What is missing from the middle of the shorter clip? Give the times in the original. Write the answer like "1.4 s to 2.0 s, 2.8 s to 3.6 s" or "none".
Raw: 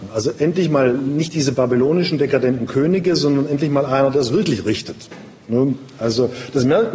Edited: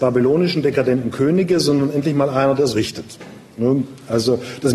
4.3 s to 4.6 s